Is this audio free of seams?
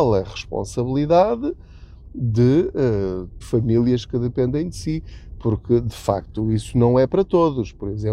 no; 1 cut; at 3.4 s

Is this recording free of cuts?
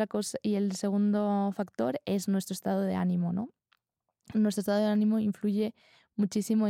yes; 0 cuts

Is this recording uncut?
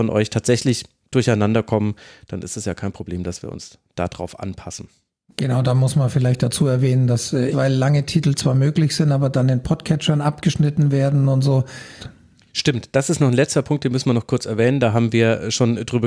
no; 2 cuts; at 7.5 s, 12.0 s

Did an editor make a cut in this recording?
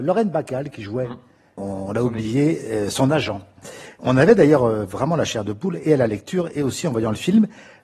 no; 0 cuts

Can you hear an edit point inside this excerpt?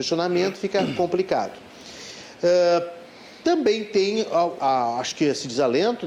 yes; 1 cut; at 4.6 s

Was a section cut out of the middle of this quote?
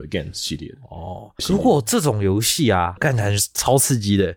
yes; 2 cuts; at 1.4 s, 3.0 s

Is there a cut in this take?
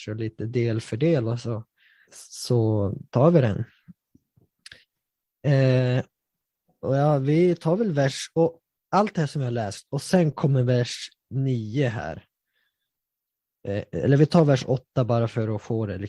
yes; 1 cut; at 2.0 s

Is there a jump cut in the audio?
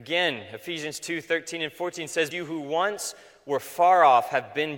yes; 1 cut; at 2.3 s

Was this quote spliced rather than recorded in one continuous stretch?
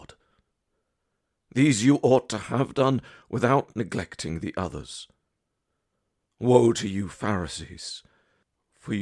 no; 0 cuts

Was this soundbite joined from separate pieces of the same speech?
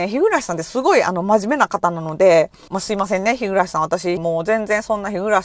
yes; 2 cuts; at 2.7 s, 4.2 s

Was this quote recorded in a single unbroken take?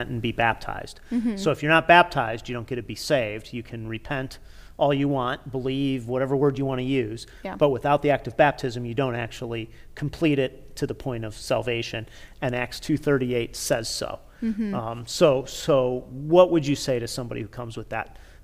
yes; 0 cuts

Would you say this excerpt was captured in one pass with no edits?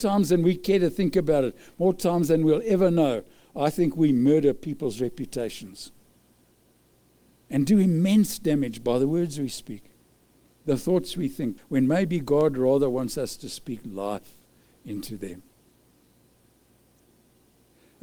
no; 1 cut; at 11.6 s

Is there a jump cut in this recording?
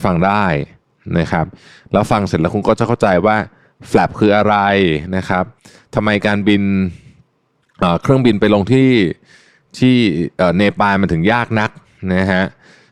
no; 0 cuts

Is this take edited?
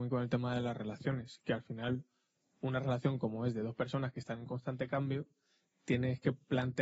no; 0 cuts

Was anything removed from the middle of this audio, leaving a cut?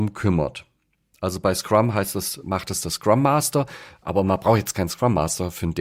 no; 0 cuts

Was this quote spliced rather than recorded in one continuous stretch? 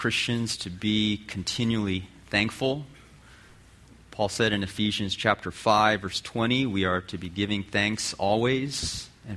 no; 0 cuts

